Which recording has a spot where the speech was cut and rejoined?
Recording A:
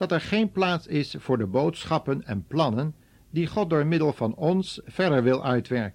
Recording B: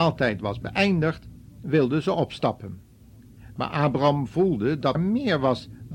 B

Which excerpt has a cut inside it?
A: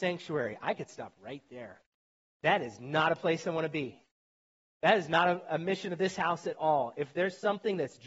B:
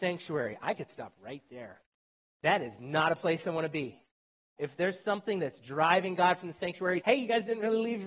B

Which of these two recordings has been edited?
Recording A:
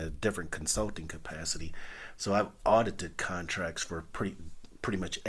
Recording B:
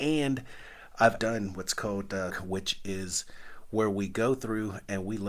B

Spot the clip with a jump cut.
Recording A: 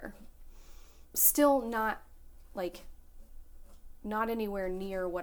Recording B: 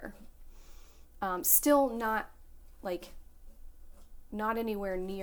A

